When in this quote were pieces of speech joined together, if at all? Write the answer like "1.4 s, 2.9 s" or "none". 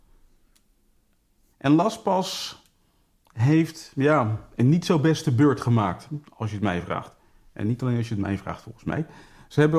1.5 s